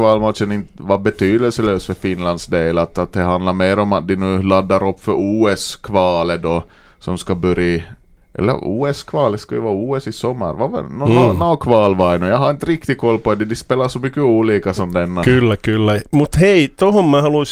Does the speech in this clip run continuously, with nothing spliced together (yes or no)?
yes